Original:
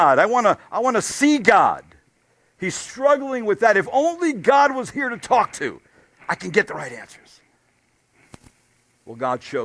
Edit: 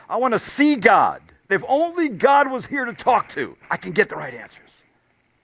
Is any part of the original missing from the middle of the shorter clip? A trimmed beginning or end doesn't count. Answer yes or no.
yes